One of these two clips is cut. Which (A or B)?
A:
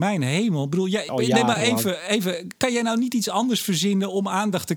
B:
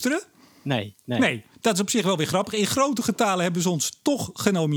A